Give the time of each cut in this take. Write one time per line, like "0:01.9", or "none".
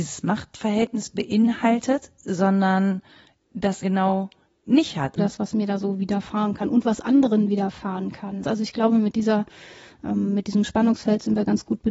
0:03.8
0:05.2
0:08.4